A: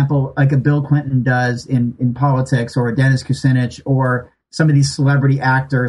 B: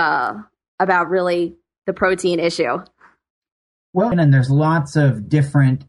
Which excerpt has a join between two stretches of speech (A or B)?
B